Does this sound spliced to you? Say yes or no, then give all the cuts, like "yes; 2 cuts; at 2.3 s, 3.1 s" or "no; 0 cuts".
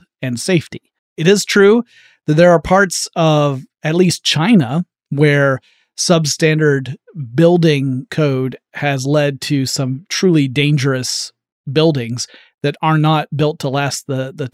yes; 1 cut; at 1.0 s